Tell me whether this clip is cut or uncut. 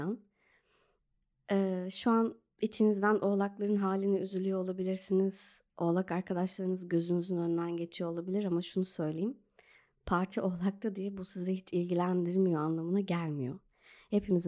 uncut